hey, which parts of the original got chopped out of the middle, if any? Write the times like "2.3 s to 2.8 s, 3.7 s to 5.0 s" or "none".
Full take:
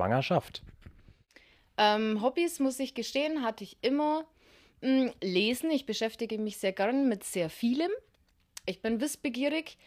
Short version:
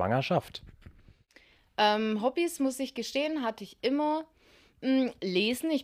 none